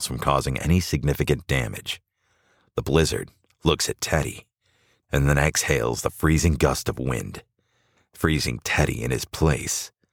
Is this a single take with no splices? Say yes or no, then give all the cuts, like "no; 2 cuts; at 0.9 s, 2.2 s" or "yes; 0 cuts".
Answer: no; 1 cut; at 5.0 s